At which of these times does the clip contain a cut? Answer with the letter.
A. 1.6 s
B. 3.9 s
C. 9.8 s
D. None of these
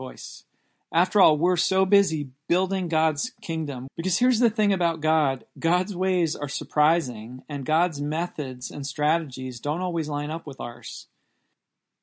B